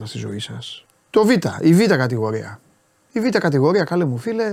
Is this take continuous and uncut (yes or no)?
no